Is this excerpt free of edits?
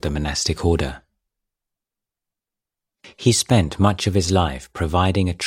yes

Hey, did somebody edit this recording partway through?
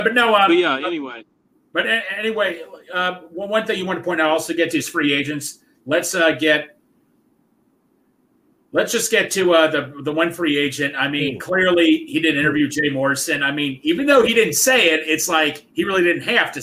no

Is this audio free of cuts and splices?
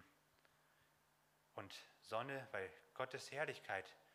no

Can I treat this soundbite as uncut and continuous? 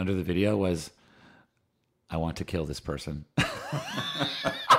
yes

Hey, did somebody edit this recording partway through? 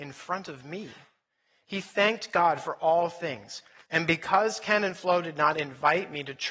yes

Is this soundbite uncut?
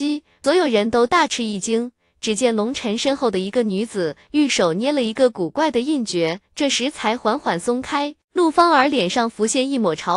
yes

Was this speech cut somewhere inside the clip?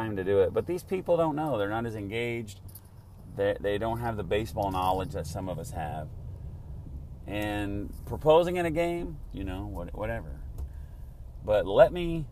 yes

